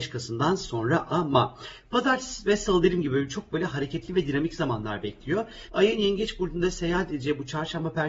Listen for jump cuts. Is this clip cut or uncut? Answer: cut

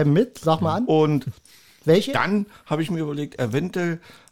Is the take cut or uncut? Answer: uncut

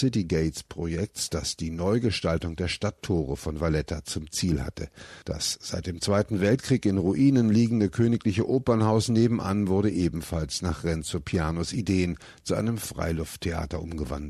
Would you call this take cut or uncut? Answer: cut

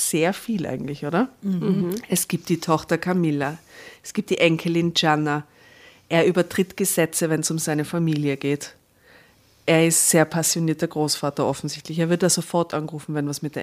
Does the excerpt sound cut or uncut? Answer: uncut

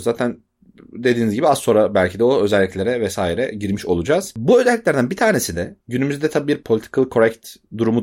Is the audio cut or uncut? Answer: uncut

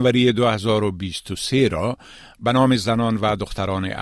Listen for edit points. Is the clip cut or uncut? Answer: uncut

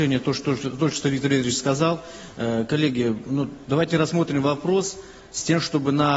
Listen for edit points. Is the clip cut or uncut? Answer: uncut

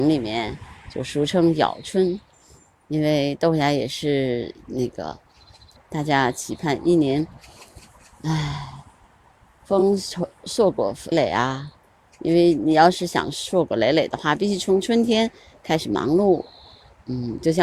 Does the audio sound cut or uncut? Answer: cut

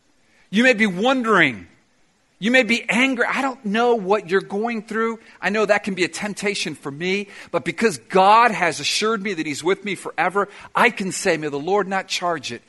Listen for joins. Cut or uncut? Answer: uncut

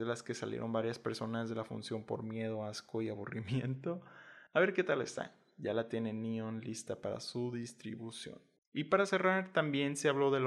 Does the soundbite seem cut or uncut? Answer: cut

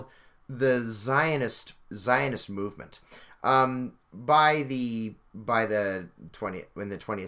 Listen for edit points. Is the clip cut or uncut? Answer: uncut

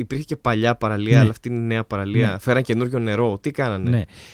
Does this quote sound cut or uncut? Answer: uncut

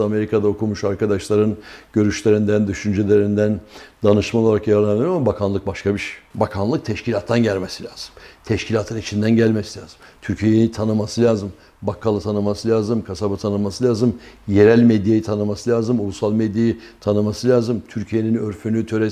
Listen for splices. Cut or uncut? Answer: uncut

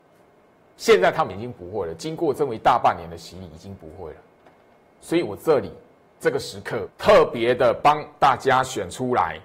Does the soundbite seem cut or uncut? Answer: cut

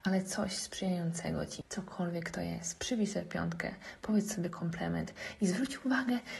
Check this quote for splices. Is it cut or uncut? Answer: cut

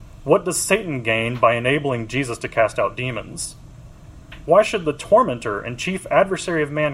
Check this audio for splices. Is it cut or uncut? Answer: uncut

